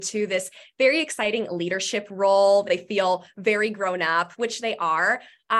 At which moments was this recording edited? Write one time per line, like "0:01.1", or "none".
none

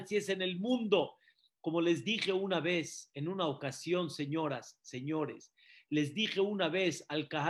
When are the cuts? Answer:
none

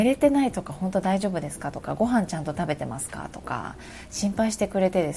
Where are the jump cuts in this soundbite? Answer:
none

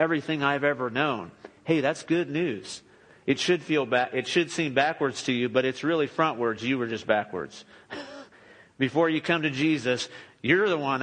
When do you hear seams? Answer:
none

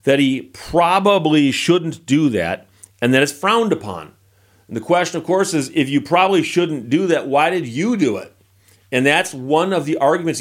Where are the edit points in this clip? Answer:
none

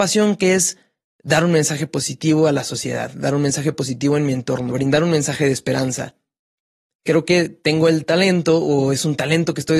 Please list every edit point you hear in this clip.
0:04.7
0:06.9

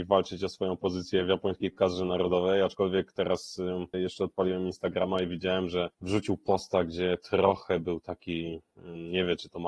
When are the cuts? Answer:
0:03.9
0:05.9

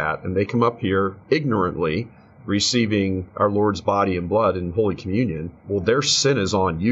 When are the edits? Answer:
0:05.6

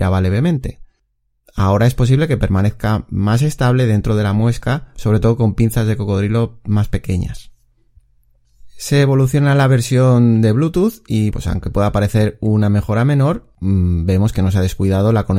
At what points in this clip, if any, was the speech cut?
0:11.3

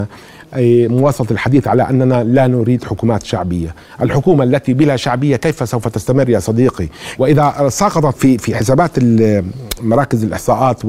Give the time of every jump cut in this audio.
0:07.2
0:08.2

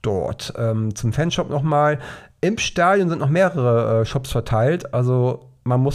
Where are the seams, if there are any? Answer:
none

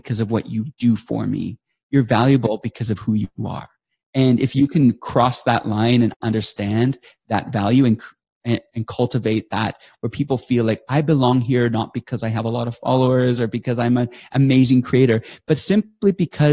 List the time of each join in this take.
none

